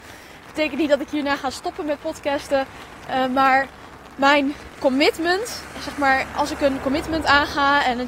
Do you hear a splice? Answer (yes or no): yes